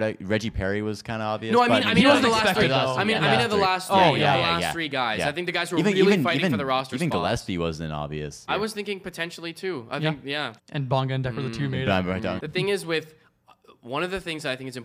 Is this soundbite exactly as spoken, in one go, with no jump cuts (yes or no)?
no